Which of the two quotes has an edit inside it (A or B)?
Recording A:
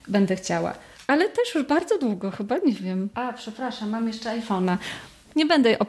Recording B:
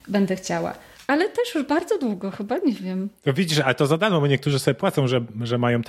A